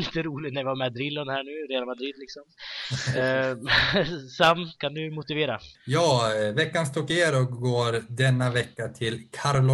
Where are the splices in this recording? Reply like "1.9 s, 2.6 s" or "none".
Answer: 5.7 s